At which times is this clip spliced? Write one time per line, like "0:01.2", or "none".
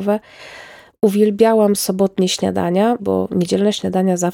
0:03.0